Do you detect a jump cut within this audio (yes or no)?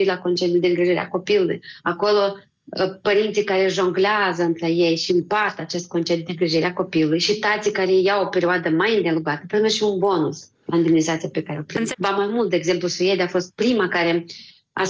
yes